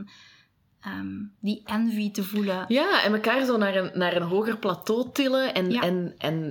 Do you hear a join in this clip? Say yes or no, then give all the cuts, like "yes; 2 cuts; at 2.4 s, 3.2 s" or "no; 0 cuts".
no; 0 cuts